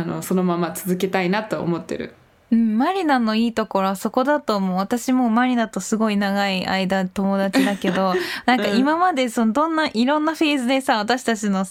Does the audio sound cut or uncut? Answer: uncut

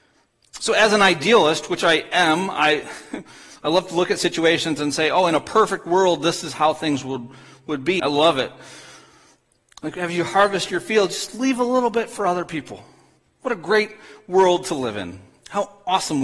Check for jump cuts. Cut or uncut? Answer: cut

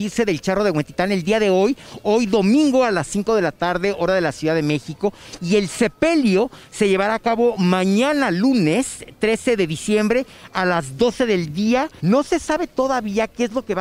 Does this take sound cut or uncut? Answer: cut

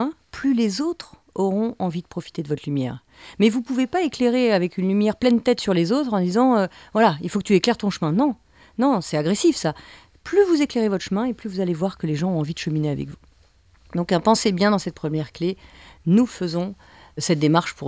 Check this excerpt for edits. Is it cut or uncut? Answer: uncut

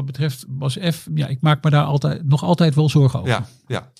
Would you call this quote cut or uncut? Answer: cut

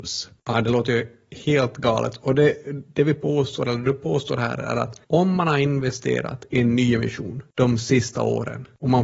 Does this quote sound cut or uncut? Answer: uncut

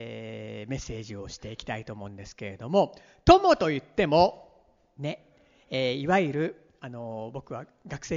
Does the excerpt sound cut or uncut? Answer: uncut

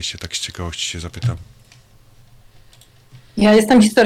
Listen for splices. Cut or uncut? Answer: uncut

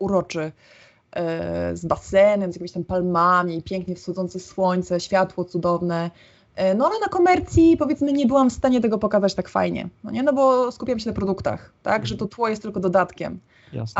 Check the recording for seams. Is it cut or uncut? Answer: uncut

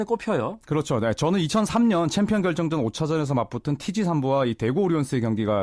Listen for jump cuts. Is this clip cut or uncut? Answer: uncut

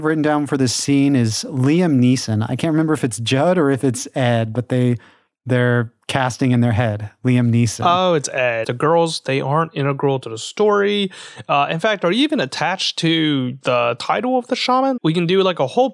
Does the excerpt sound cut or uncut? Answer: cut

